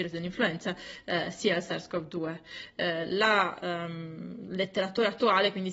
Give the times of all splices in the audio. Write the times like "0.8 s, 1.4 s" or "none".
none